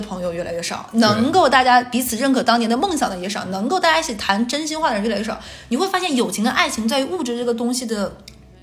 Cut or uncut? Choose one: uncut